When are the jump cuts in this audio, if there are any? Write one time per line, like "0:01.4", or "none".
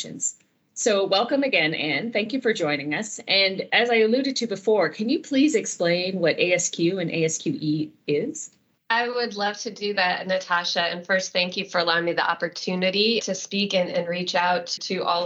none